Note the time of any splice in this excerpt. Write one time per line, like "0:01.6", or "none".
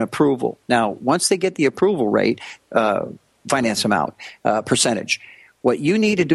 0:02.6